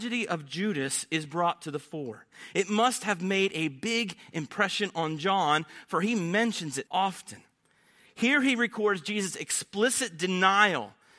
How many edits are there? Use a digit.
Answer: 1